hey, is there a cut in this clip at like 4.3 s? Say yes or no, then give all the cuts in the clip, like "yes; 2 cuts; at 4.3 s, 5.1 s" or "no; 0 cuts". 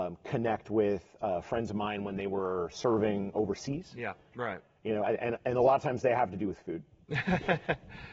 yes; 1 cut; at 4.3 s